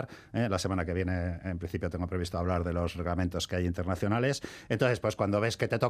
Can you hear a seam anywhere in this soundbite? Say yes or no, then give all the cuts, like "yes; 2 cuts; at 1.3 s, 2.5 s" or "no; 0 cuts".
no; 0 cuts